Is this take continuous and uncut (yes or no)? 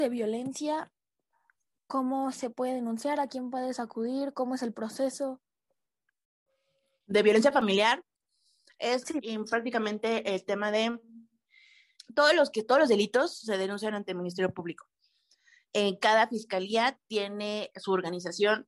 yes